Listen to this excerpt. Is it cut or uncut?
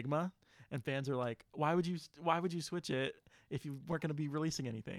uncut